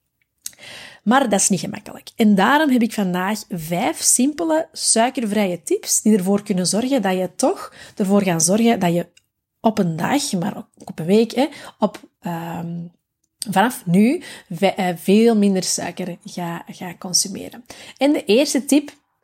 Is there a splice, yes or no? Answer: no